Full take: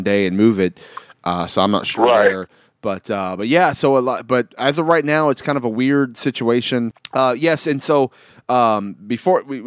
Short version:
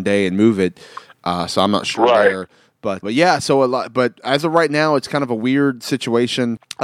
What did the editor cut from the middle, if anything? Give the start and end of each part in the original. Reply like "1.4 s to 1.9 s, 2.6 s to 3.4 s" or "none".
3.0 s to 3.4 s